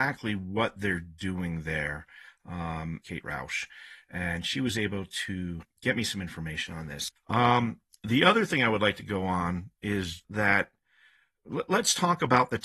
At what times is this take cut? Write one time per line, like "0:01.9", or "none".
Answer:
0:03.0
0:07.2
0:10.2